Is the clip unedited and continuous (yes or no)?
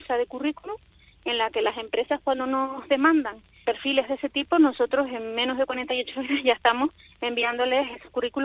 no